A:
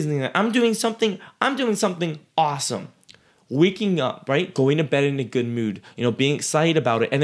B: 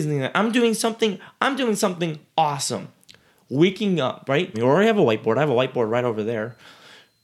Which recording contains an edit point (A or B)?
B